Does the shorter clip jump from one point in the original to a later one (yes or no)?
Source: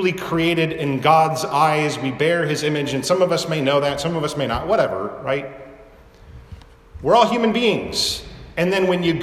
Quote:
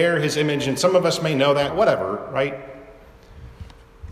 yes